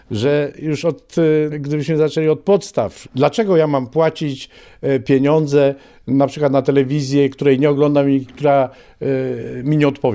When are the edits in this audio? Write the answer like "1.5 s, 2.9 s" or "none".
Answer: 1.5 s, 3.0 s